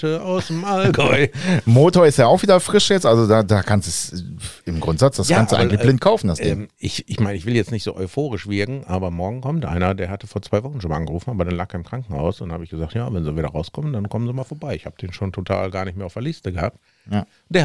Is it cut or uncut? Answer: uncut